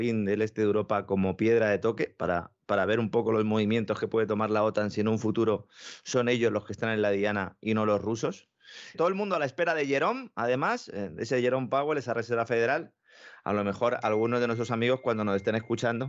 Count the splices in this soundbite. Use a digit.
1